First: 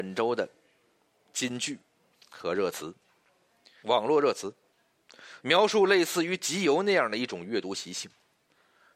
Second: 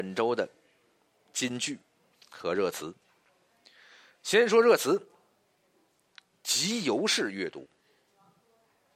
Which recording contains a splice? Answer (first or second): first